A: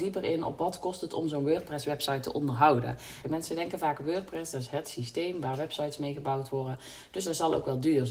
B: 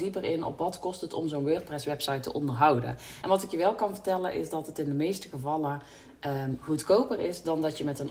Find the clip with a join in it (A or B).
A